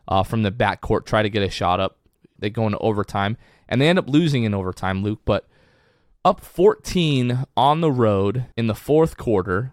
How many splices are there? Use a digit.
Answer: 2